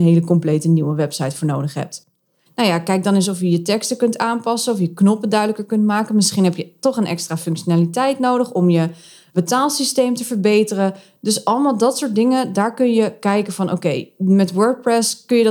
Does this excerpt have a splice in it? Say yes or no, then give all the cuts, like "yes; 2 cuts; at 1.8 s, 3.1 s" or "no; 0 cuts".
yes; 1 cut; at 2.5 s